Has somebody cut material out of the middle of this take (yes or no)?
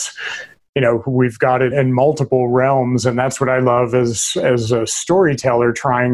yes